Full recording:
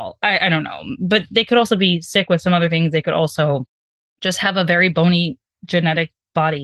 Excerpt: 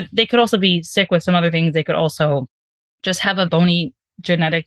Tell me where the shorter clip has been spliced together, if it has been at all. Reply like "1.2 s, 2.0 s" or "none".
3.5 s